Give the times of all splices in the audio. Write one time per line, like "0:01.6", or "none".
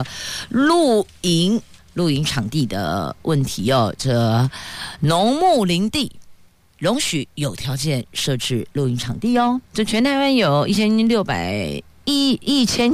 none